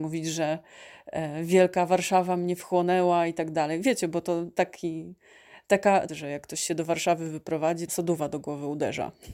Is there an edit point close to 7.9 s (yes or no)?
yes